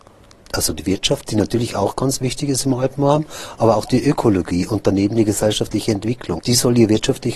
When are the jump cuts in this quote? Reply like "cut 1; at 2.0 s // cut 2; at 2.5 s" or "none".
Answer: cut 1; at 6.4 s